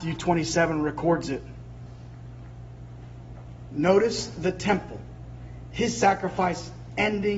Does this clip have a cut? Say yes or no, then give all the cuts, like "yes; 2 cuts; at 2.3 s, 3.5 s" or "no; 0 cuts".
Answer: no; 0 cuts